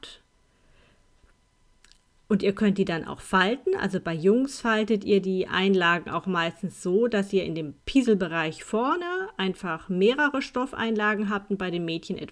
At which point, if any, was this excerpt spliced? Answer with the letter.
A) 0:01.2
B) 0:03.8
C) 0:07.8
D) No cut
C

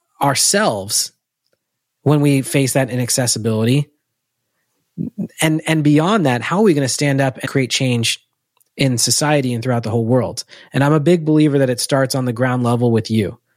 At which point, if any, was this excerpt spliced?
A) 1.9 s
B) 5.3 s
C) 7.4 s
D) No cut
C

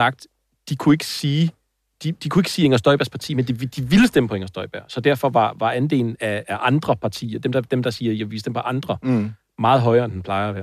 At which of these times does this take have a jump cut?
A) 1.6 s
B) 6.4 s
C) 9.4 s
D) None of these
B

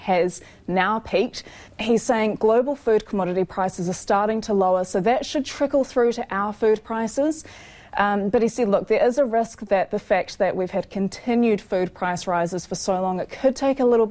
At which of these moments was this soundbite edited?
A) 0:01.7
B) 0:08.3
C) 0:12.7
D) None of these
A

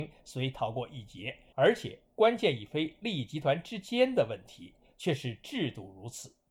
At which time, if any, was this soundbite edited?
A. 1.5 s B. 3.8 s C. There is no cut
A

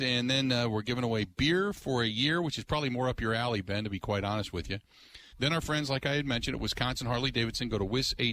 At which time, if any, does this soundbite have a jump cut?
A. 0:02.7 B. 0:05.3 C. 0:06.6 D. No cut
B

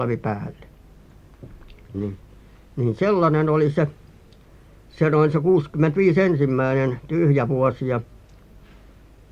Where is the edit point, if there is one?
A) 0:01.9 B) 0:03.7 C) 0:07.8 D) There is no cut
A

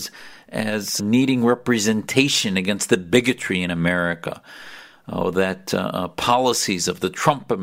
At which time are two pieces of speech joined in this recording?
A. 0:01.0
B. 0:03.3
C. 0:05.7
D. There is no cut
A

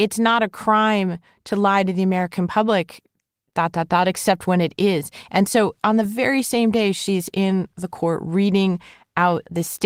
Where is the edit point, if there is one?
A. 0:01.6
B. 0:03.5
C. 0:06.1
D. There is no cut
D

